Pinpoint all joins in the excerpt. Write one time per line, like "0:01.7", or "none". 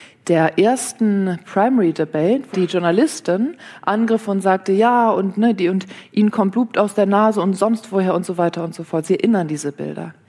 0:02.5